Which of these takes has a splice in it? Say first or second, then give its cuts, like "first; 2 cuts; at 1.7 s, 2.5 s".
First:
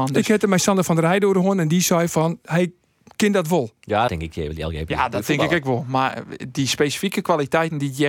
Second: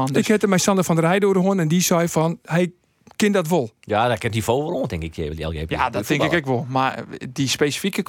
first; 1 cut; at 4.1 s